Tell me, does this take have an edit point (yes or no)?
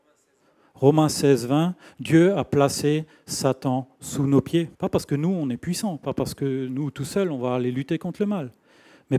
yes